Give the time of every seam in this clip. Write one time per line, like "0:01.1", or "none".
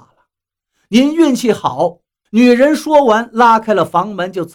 0:02.3